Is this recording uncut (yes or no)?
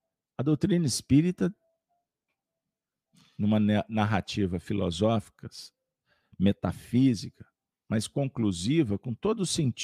yes